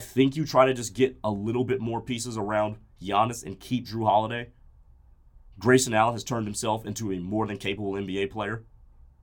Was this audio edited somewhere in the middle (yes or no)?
yes